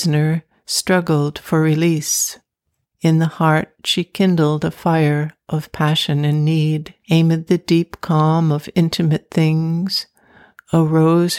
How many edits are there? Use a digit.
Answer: 2